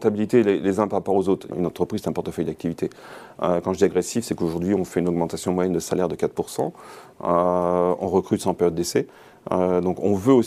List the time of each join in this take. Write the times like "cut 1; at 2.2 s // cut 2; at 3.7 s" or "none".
cut 1; at 1.5 s // cut 2; at 3.4 s